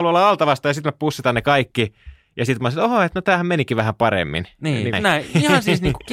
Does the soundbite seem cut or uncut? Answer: cut